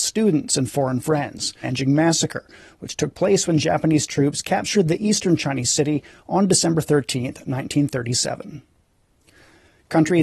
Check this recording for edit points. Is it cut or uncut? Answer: cut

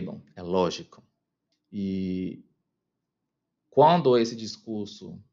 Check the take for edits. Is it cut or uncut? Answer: cut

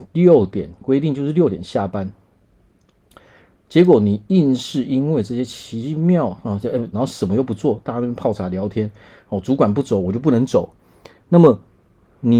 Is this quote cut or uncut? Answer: cut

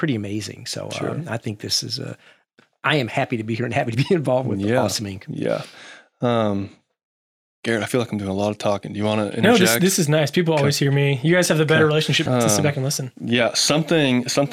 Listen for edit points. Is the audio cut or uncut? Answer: cut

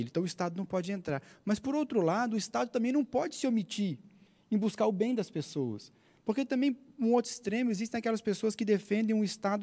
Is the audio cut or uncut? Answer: uncut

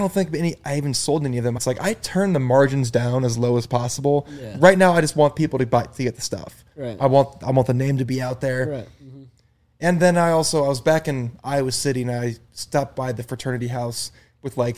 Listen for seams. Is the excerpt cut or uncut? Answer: cut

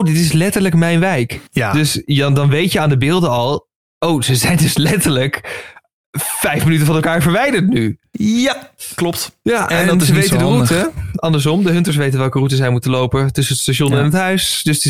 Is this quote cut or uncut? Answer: cut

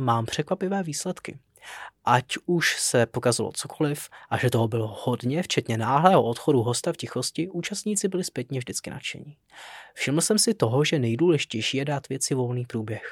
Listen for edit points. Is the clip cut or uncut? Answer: uncut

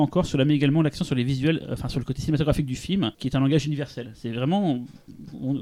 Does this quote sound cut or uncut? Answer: cut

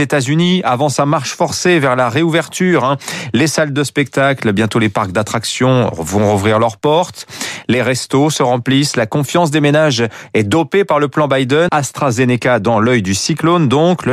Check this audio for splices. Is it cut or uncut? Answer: cut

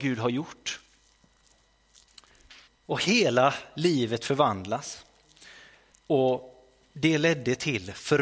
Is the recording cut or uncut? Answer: cut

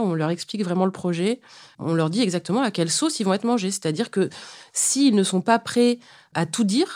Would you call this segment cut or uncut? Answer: uncut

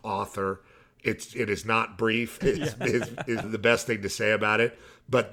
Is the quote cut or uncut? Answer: cut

